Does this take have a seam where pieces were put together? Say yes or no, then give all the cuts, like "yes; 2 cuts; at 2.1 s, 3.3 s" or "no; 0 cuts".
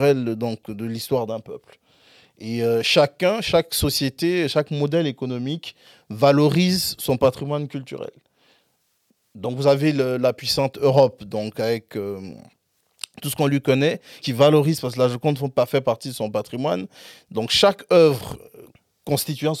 yes; 1 cut; at 14.2 s